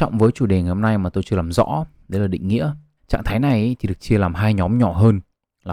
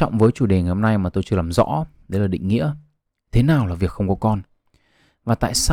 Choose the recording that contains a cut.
first; 1 cut; at 3.0 s

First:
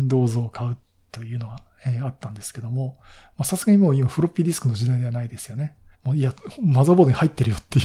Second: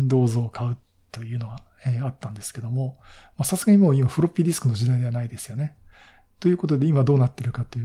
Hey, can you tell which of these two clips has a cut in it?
first; 1 cut; at 5.9 s

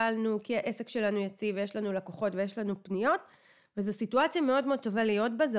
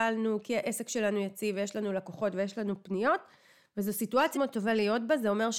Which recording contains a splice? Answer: second; 1 cut; at 4.3 s

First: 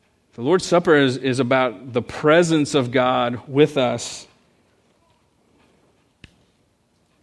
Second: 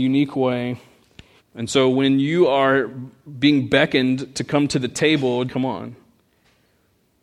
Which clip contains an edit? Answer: second; 2 cuts; at 1.4 s, 5.5 s

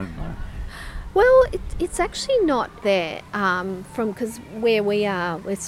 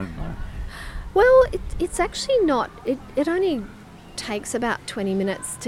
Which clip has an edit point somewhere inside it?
first; 1 cut; at 2.8 s

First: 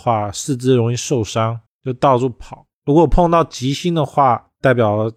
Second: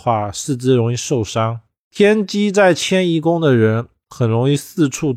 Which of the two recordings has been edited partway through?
first; 2 cuts; at 1.7 s, 2.7 s

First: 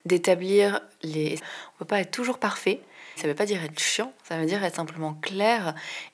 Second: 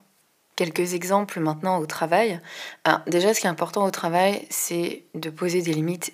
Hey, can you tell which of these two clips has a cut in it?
first; 2 cuts; at 1.4 s, 3.2 s

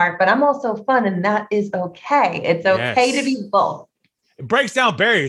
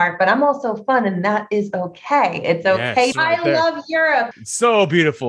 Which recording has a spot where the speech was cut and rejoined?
second; 2 cuts; at 3.1 s, 4.3 s

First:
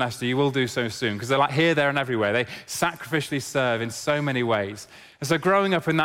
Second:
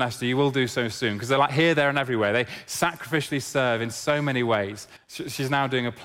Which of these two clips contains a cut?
second; 1 cut; at 5.0 s

